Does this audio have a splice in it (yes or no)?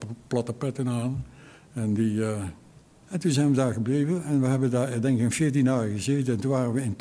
yes